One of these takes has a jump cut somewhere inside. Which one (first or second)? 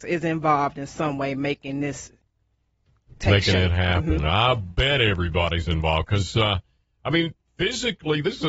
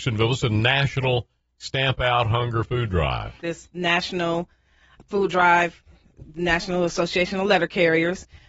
second